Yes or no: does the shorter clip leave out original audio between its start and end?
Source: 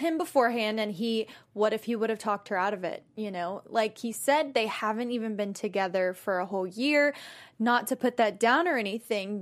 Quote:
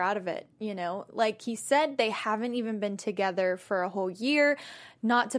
no